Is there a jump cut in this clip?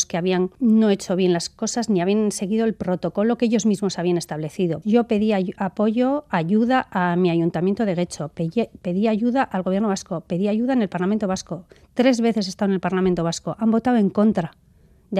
yes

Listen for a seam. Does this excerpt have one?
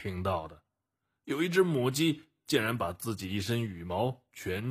no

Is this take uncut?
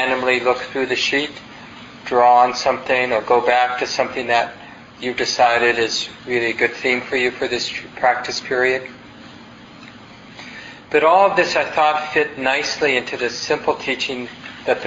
yes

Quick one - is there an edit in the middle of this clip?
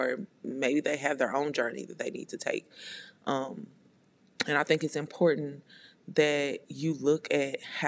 no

